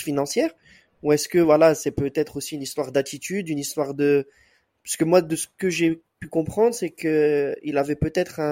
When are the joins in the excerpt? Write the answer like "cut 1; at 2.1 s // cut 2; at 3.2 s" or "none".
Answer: none